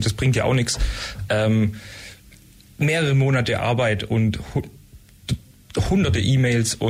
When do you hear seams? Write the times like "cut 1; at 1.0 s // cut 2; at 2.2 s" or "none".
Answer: none